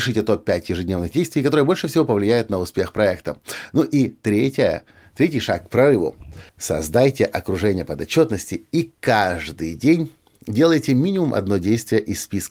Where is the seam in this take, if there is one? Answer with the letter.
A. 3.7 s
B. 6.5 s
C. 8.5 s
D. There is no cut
B